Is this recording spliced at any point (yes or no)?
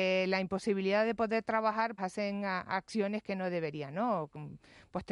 yes